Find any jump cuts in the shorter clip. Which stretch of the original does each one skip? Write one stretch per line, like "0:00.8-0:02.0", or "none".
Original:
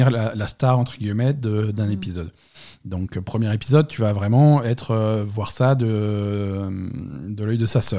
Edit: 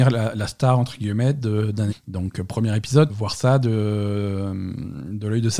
0:01.9-0:02.7
0:03.9-0:05.3